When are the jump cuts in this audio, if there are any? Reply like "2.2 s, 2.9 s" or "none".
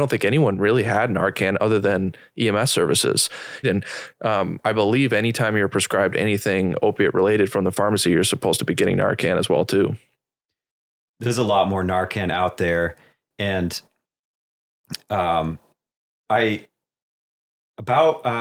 3.6 s